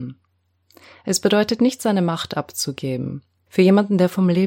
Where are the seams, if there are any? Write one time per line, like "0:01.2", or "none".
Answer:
0:03.5